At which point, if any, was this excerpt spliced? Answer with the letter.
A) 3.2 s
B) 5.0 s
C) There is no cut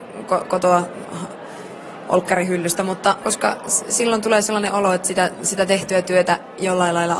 A